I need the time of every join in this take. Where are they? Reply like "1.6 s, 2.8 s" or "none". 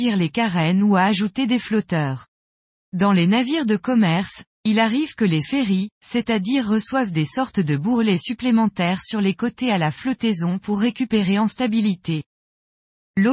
6.0 s

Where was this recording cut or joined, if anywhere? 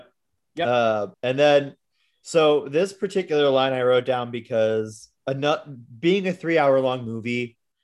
1.1 s, 5.2 s

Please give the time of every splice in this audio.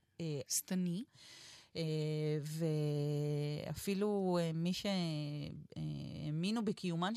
1.1 s

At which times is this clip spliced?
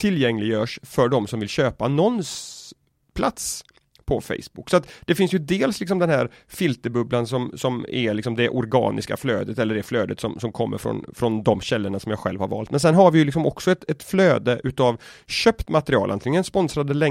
none

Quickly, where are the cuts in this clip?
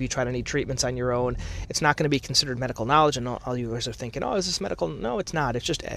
1.6 s

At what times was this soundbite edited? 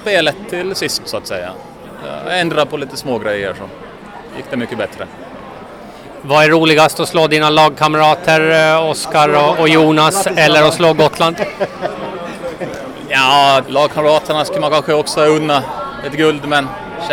13.6 s

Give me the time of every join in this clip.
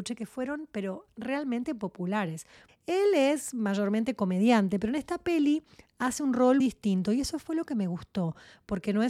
2.7 s, 6.6 s

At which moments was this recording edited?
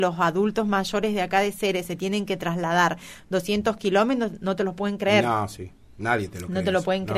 none

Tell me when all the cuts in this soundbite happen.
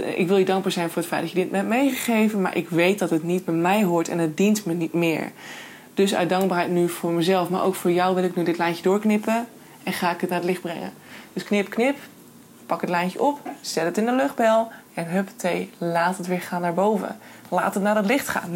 none

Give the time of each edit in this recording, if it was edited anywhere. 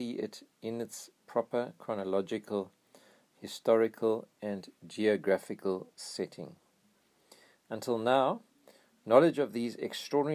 none

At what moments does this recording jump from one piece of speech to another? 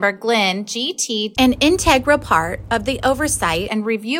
1.3 s

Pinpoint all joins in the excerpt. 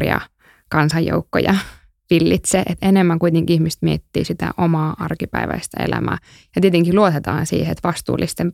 none

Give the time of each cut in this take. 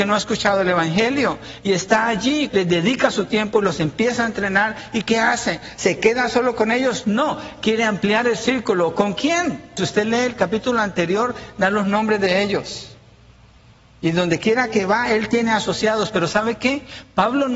2.5 s, 9.8 s

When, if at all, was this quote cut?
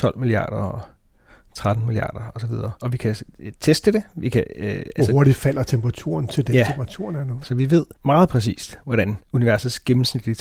2.8 s, 7.4 s

